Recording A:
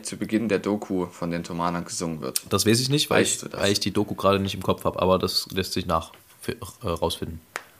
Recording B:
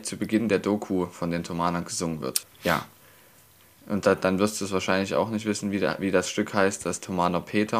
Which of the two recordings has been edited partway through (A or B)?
B